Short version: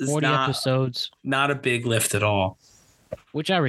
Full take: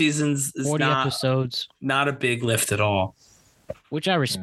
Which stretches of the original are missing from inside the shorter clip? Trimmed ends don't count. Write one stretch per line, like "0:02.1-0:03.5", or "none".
none